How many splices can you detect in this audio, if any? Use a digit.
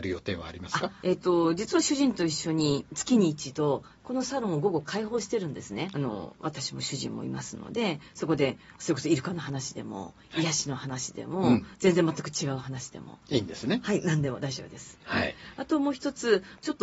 3